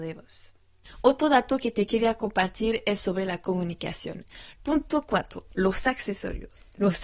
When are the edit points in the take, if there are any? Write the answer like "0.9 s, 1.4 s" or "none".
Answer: 4.6 s